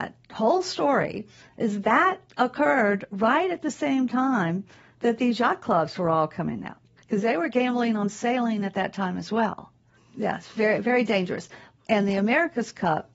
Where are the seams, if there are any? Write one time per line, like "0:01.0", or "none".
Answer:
0:07.0
0:09.9
0:11.8